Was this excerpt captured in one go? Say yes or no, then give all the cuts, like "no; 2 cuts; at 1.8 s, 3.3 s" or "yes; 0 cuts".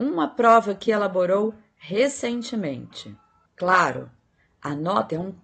no; 1 cut; at 3.5 s